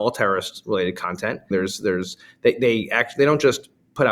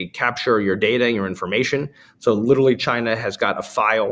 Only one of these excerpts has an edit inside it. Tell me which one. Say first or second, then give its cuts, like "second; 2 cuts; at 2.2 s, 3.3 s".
first; 1 cut; at 1.5 s